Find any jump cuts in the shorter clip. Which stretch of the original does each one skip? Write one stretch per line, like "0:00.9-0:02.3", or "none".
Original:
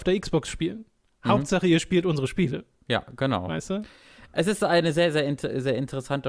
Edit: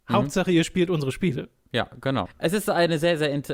0:03.4-0:04.2